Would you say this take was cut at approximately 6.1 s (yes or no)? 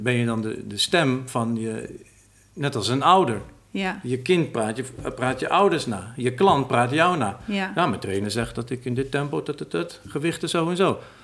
no